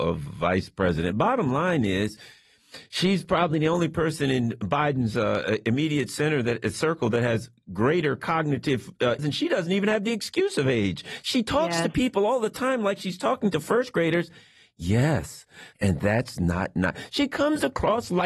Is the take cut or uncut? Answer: cut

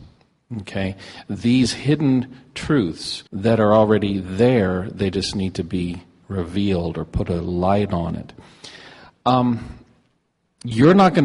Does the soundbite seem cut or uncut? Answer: cut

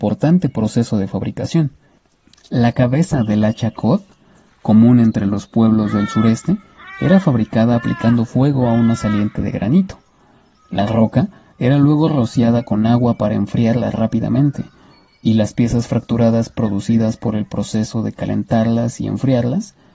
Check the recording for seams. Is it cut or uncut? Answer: uncut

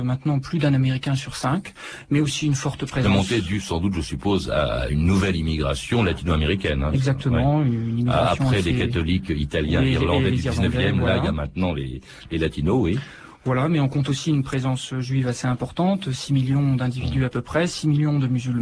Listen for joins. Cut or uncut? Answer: uncut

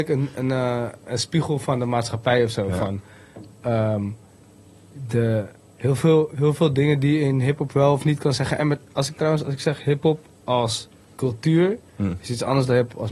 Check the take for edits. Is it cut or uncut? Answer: uncut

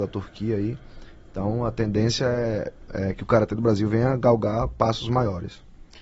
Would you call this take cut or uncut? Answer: uncut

